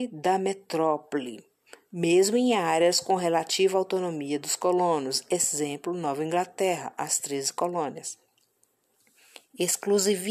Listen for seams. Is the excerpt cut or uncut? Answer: uncut